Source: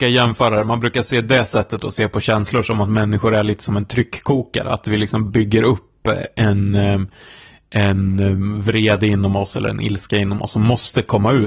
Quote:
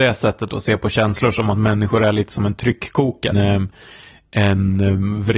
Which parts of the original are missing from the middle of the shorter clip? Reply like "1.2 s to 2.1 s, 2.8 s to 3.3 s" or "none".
4.6 s to 6.7 s